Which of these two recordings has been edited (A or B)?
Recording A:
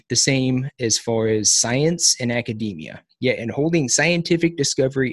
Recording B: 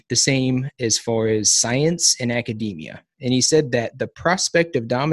A